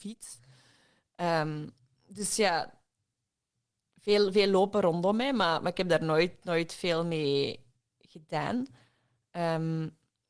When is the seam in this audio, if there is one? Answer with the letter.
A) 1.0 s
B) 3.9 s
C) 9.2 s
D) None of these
D